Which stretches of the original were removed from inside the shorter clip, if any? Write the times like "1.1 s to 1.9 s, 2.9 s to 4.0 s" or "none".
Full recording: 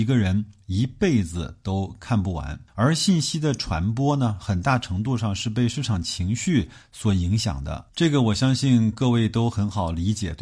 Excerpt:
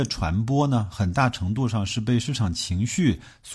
none